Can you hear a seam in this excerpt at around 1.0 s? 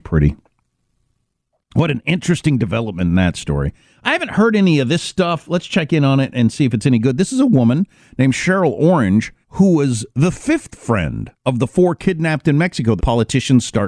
no; 3 cuts; at 9.4 s, 11.4 s, 13.0 s

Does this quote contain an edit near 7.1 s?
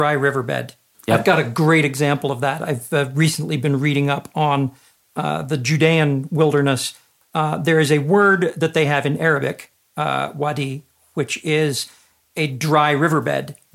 no; 1 cut; at 0.9 s

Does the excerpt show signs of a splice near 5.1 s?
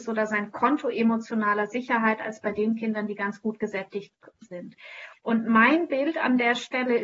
yes; 1 cut; at 5.1 s

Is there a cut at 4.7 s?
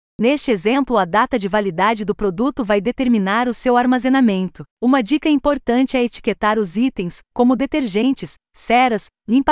yes; 2 cuts; at 4.7 s, 8.5 s

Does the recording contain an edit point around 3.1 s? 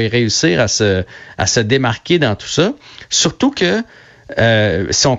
no; 0 cuts

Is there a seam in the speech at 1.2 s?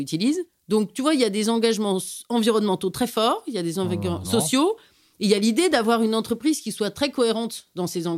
no; 1 cut; at 4.2 s

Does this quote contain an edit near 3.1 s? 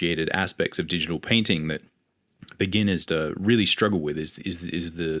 yes; 1 cut; at 3.1 s

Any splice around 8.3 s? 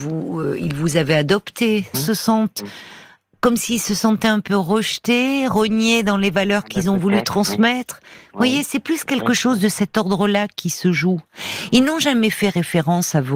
no; 1 cut; at 1.9 s

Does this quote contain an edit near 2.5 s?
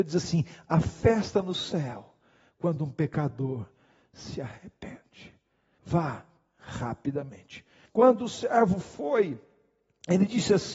no; 2 cuts; at 5.8 s, 7.8 s

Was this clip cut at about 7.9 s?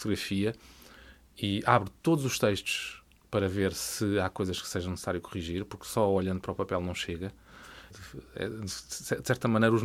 yes; 1 cut; at 7.9 s

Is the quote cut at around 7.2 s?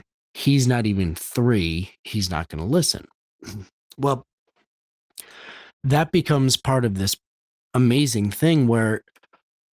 no; 0 cuts

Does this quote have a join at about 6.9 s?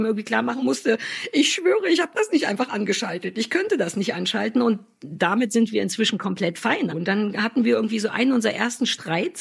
yes; 1 cut; at 6.9 s

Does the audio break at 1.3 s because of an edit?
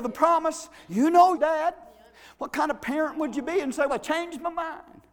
yes; 2 cuts; at 1.3 s, 3.9 s

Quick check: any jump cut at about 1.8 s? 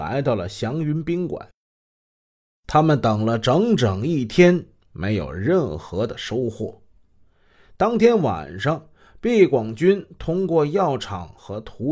no; 0 cuts

